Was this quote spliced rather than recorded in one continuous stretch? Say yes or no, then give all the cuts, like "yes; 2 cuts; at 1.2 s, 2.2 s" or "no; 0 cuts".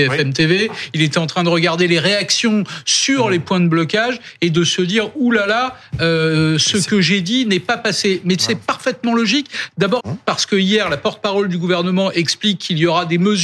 yes; 1 cut; at 10.0 s